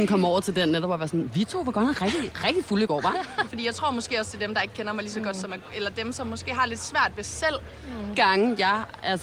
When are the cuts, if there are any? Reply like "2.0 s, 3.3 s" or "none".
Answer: 3.5 s, 8.1 s